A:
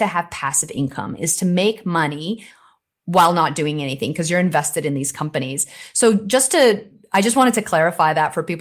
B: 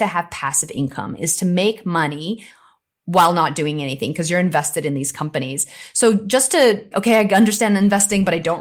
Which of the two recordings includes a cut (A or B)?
B